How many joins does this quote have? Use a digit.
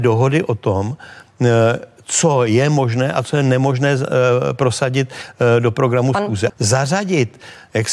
1